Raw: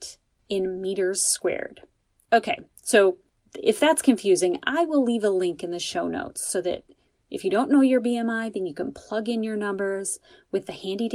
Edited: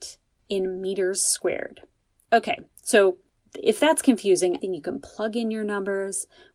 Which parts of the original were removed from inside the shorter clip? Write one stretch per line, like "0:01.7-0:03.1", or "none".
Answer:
0:04.6-0:08.5